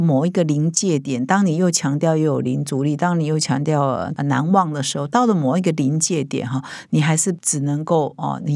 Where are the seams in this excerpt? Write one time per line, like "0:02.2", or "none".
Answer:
none